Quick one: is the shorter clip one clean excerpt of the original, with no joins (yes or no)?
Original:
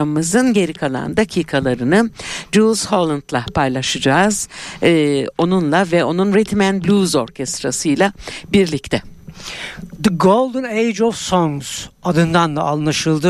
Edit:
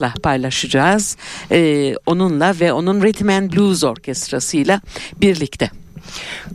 yes